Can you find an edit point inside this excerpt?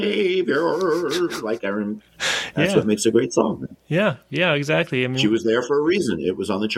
no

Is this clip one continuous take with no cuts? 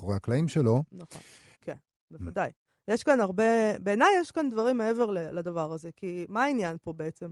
no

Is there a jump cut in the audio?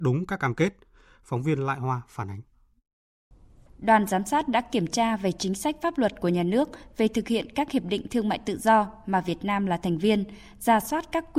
no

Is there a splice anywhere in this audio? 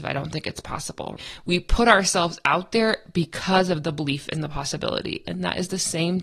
no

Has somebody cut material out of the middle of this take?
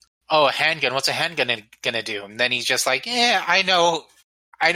no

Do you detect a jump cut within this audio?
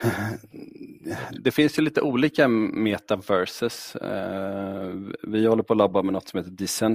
no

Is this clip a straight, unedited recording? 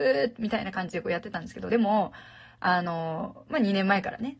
yes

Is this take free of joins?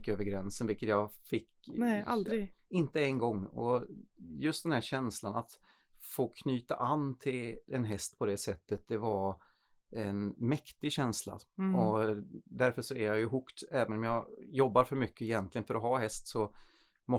yes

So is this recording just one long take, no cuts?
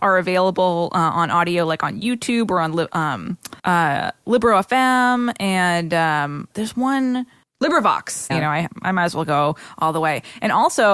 no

